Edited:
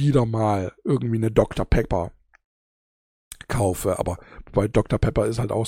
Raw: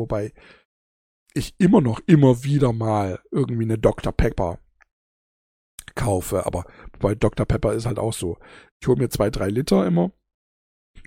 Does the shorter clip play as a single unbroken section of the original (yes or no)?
yes